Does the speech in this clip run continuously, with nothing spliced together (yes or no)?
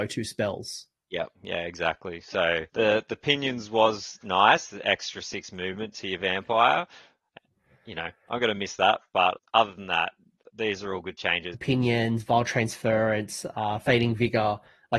no